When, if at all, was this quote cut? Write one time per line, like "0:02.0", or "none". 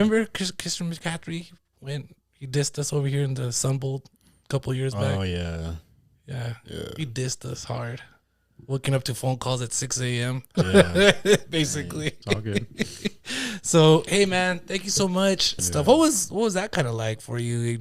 0:10.5
0:15.6